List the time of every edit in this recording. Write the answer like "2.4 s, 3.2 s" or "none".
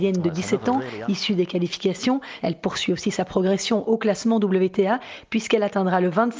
1.1 s, 2.4 s